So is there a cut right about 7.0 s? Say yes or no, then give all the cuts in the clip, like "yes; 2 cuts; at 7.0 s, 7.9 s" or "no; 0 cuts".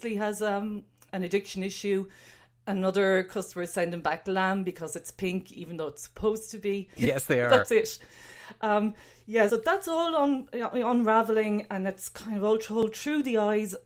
yes; 2 cuts; at 7.0 s, 9.5 s